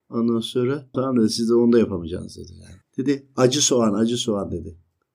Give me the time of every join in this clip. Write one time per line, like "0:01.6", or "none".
0:00.9